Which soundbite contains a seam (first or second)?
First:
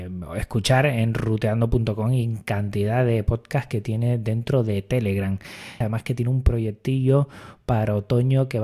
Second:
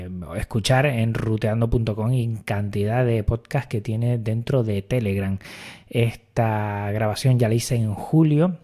first